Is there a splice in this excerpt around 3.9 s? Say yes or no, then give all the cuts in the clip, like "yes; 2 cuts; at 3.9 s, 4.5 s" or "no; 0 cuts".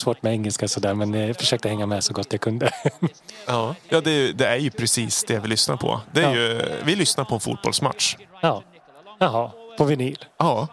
yes; 1 cut; at 3.9 s